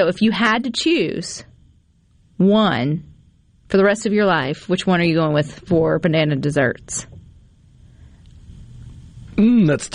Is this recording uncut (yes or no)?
yes